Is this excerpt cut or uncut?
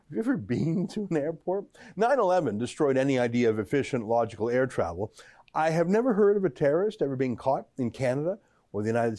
uncut